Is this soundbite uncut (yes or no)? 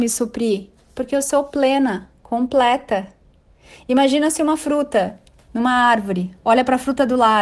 yes